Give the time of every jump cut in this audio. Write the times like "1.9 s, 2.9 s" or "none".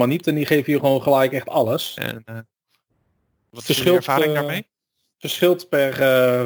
2.0 s

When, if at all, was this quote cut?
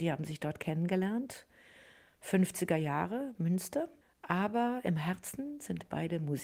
none

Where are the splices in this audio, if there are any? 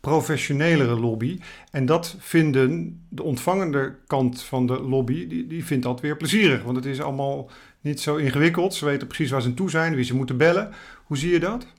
none

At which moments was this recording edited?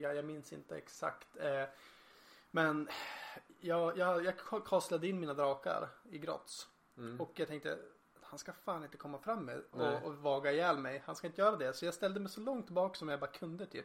9.7 s

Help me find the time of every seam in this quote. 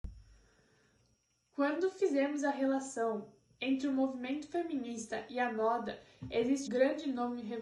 6.7 s

